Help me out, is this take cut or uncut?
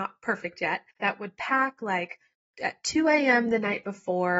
cut